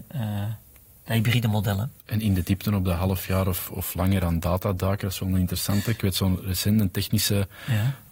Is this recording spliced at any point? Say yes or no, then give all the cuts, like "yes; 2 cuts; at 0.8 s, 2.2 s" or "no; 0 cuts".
yes; 1 cut; at 3.7 s